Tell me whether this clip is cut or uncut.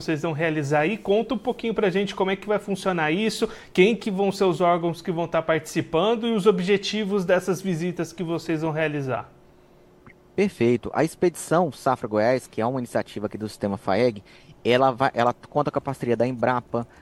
uncut